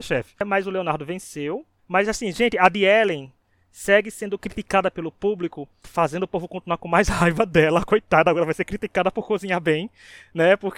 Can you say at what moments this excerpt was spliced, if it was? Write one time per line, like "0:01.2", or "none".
0:01.8
0:05.8

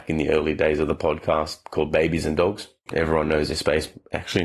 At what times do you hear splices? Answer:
0:02.9

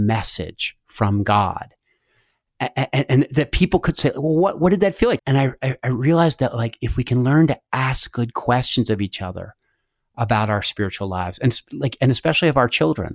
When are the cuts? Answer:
0:05.2

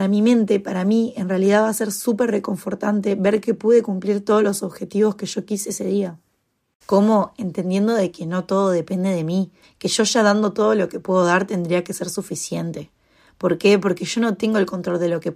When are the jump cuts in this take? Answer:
0:06.8
0:09.6

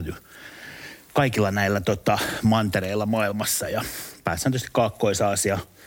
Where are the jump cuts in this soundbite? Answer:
none

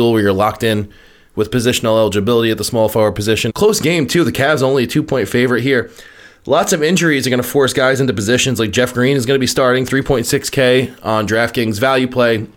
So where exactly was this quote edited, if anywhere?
0:03.5

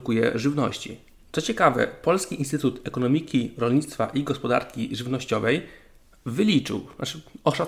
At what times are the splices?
0:01.2

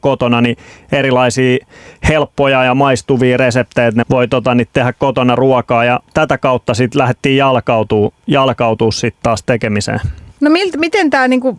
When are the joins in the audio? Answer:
0:04.0
0:10.3

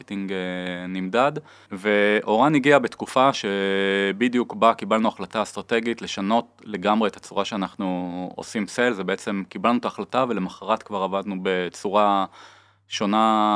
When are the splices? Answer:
0:01.7

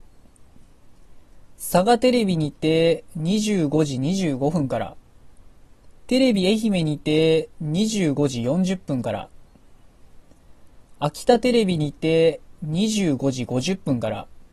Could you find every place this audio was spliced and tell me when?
0:06.0

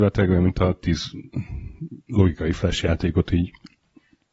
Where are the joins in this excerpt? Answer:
none

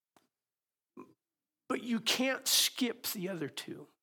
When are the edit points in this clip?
none

